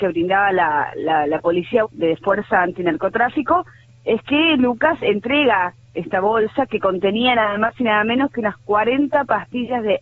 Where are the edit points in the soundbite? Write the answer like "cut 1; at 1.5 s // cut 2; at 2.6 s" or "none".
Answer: cut 1; at 1.8 s